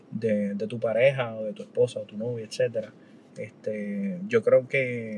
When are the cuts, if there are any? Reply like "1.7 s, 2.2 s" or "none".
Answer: none